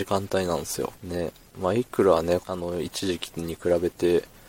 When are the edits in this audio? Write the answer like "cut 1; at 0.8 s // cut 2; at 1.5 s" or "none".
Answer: cut 1; at 1.0 s // cut 2; at 2.4 s

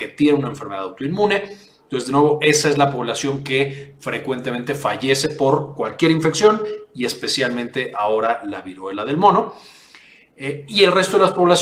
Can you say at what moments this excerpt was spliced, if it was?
none

